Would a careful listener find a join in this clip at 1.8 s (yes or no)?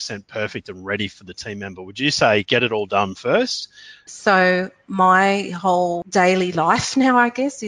no